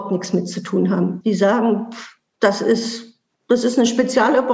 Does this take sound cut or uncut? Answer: cut